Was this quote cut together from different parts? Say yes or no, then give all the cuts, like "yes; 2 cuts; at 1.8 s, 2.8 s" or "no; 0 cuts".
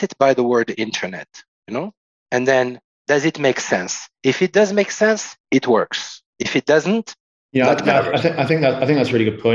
no; 0 cuts